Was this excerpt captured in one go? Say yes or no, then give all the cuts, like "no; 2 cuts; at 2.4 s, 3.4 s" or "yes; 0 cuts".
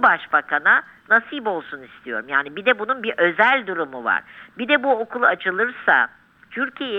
yes; 0 cuts